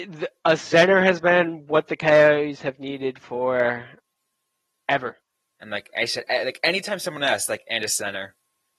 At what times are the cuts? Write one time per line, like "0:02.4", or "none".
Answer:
0:05.4